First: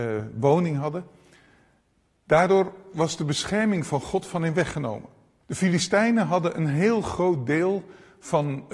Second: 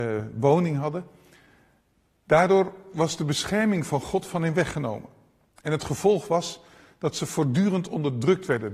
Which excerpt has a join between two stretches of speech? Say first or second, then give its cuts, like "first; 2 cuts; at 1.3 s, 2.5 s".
first; 1 cut; at 5.4 s